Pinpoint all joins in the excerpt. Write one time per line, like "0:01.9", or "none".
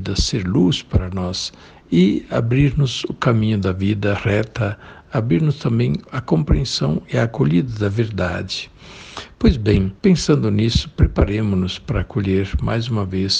0:10.0